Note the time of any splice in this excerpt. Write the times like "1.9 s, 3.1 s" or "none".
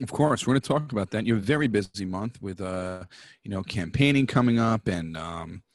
none

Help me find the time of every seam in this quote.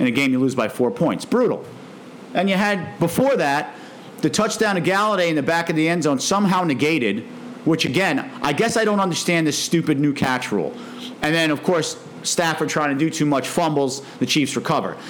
11.1 s, 12.2 s

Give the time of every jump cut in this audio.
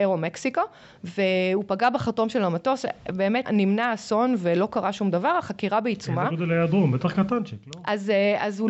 3.4 s

